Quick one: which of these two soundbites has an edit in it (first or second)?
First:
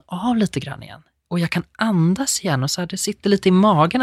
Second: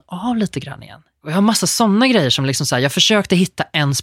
second